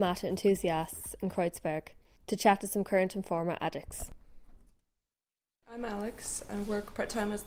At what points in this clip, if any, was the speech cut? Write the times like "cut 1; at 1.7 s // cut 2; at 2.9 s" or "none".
none